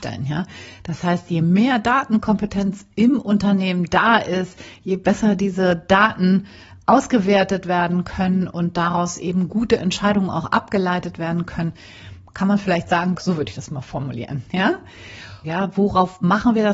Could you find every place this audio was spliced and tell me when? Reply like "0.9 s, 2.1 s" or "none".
13.2 s, 15.4 s